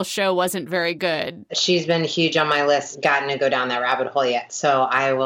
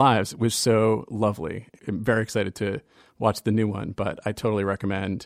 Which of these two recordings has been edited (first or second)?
first